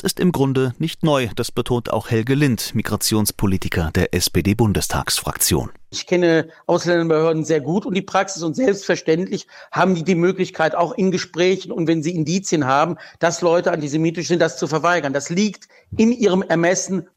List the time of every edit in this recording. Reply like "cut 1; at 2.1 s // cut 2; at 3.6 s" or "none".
none